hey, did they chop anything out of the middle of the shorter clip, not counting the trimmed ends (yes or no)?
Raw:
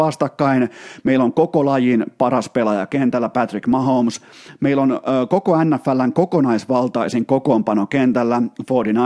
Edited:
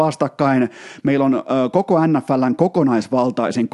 yes